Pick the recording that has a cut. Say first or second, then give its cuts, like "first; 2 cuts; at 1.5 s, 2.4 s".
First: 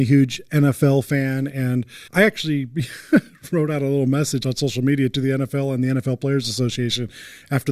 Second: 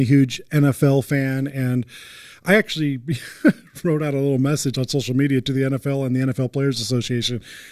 first; 1 cut; at 2.1 s